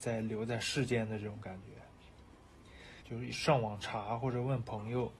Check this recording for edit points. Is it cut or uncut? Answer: cut